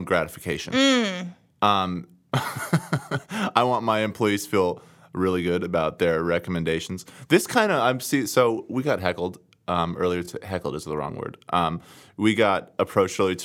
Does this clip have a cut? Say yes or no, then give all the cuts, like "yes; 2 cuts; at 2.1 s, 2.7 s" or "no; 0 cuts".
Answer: no; 0 cuts